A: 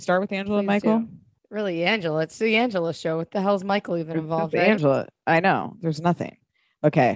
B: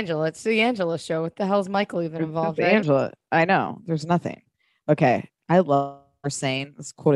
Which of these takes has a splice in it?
A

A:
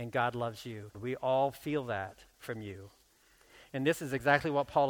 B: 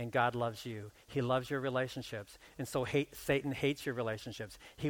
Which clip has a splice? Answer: A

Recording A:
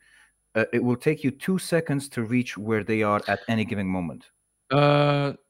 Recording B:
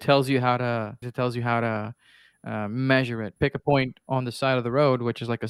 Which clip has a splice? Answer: B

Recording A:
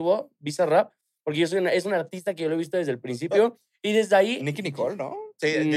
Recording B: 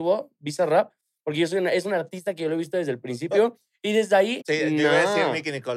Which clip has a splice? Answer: B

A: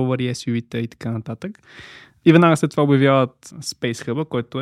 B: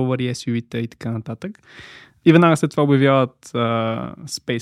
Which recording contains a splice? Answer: A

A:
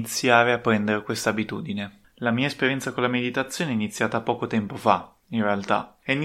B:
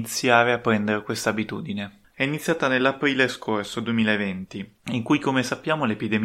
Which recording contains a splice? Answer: B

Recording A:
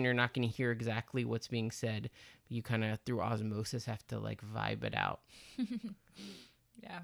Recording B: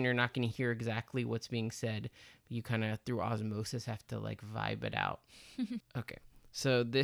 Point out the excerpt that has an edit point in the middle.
B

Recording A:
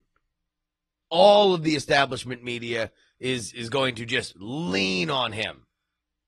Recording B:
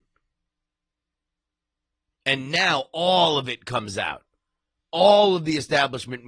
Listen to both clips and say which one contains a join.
A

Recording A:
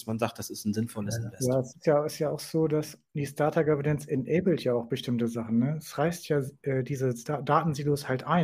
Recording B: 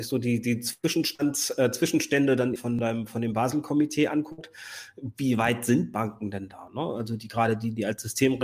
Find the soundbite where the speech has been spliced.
B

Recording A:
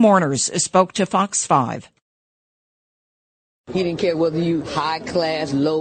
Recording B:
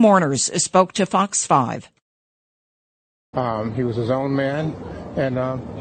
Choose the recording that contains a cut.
B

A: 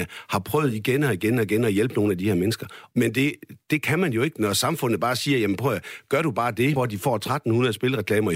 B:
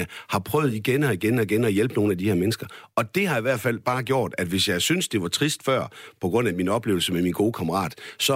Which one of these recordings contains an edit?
A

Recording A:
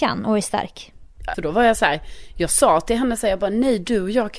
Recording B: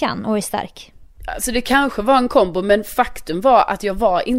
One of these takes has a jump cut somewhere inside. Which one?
A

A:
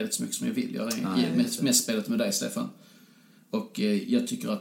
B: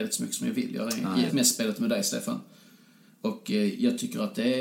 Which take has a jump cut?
B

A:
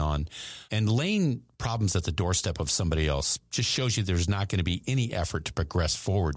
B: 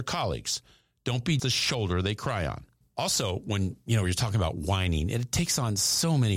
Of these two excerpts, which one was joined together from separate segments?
B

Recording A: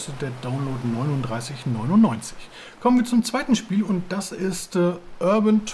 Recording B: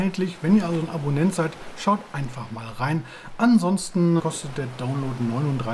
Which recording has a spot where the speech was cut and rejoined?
B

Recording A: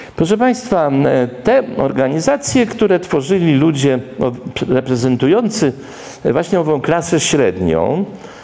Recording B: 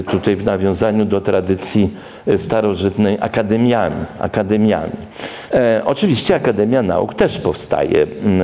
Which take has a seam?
B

